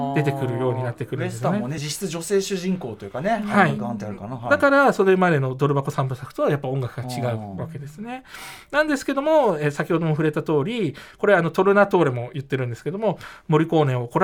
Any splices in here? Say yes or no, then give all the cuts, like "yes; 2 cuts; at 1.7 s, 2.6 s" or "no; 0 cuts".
no; 0 cuts